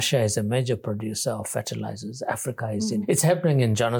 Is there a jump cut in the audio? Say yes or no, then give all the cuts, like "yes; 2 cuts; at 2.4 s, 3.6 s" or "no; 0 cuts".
yes; 1 cut; at 3.0 s